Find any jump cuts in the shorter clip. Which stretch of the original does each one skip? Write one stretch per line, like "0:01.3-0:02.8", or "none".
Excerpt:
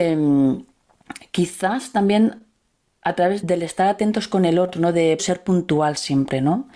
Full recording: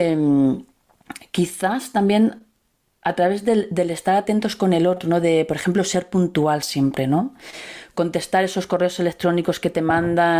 0:03.4-0:03.7
0:05.5-0:05.8